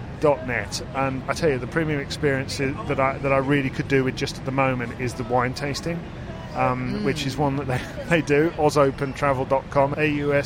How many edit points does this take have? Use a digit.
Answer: 1